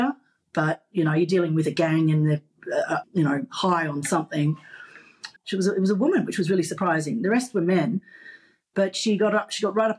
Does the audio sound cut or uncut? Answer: cut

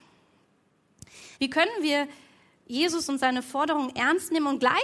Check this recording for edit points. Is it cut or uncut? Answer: cut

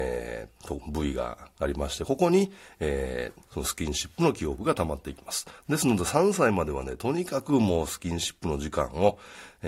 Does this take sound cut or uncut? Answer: uncut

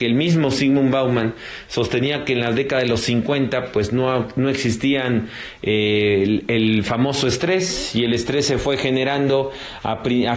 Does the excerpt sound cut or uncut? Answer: uncut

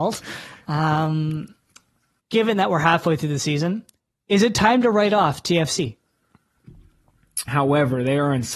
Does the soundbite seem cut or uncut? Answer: cut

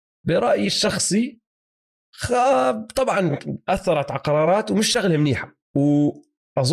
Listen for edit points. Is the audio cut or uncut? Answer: cut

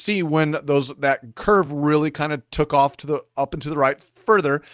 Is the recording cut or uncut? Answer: uncut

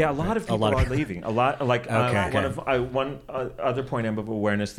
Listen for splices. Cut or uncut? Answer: cut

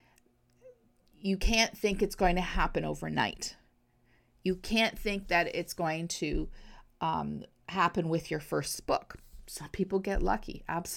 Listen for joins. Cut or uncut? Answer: uncut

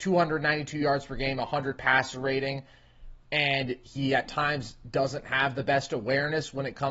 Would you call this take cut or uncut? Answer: cut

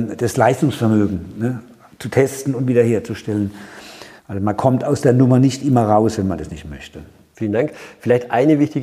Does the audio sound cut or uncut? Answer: cut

